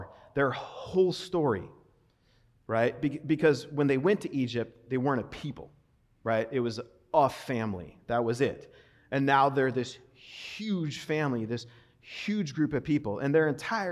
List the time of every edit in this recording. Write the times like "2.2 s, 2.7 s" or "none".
none